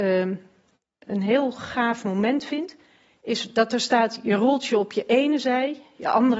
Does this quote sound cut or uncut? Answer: uncut